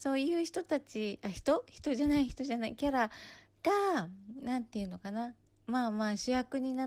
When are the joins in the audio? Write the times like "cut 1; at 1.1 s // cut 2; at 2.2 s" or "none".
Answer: none